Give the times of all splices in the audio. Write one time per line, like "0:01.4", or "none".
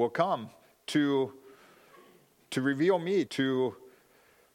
0:03.3